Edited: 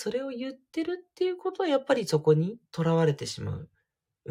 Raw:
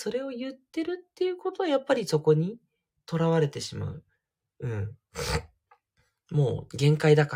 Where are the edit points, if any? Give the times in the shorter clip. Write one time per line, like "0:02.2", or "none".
0:02.6